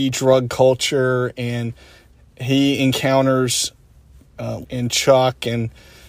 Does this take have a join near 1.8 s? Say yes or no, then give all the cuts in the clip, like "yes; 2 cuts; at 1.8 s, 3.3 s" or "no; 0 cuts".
no; 1 cut; at 4.6 s